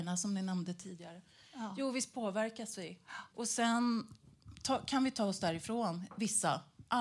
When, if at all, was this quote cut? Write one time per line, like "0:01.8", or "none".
0:03.3